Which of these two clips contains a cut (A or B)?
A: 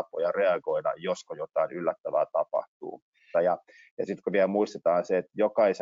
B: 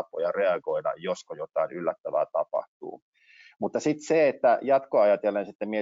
A